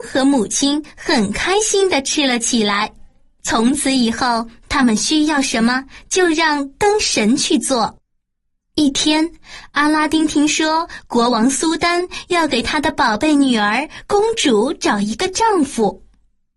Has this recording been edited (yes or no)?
no